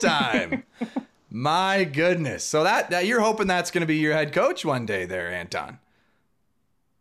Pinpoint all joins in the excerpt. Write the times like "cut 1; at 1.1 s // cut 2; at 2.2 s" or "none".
none